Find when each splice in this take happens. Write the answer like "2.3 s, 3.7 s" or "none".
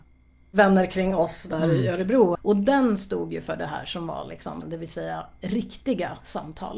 2.4 s, 4.6 s